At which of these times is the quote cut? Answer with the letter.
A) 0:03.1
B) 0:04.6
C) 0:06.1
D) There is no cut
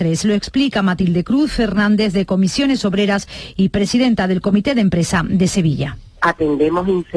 D